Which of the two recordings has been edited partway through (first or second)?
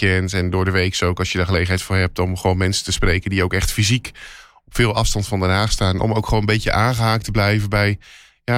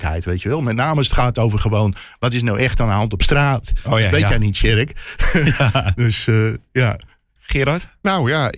second